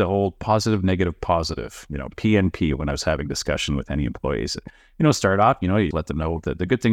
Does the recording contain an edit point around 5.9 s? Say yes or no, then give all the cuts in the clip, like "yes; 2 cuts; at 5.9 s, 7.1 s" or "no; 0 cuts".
yes; 1 cut; at 5.9 s